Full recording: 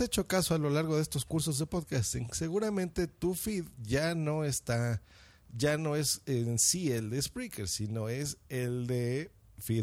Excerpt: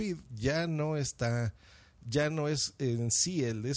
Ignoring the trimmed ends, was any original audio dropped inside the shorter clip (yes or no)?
no